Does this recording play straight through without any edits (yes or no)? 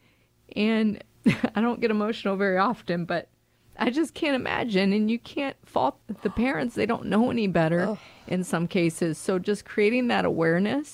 yes